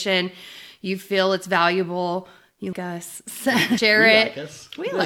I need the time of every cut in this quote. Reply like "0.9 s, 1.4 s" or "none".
2.7 s